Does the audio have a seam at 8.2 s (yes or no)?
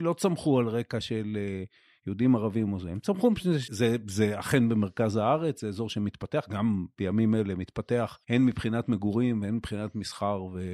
yes